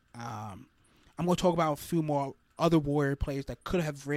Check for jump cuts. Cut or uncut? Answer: uncut